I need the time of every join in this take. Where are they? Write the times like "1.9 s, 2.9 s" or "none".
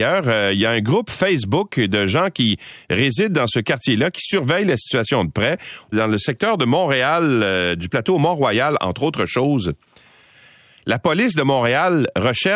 5.9 s